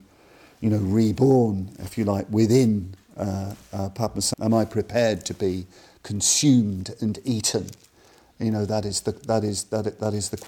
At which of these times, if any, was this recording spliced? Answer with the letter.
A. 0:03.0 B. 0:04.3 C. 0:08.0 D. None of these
B